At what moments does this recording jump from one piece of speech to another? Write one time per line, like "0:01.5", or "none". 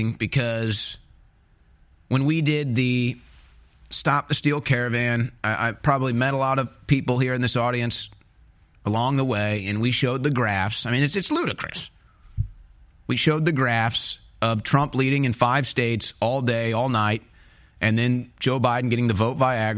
none